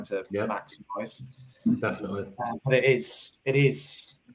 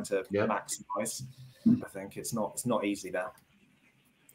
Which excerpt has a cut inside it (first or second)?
second